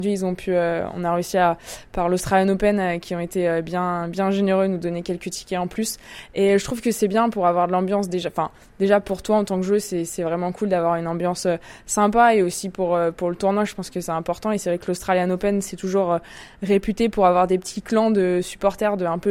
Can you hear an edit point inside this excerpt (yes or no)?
no